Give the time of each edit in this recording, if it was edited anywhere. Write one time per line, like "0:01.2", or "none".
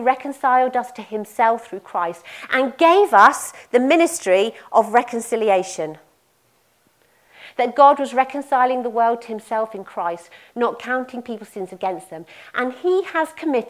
none